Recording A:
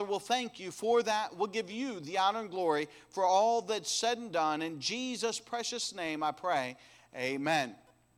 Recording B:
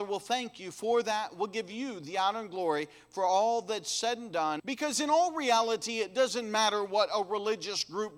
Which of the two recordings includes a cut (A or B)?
B